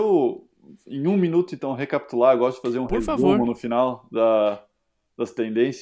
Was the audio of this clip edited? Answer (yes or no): no